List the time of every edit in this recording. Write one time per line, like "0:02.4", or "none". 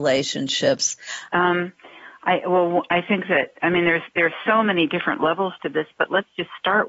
0:01.3